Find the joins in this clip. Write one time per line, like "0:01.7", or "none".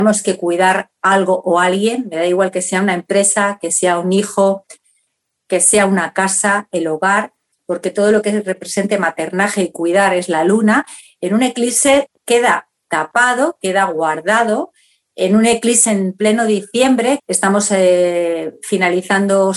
0:15.9
0:17.2